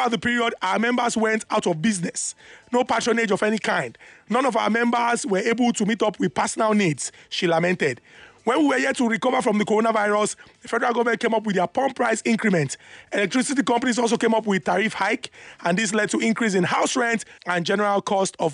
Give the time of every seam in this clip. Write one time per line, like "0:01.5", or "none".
0:17.4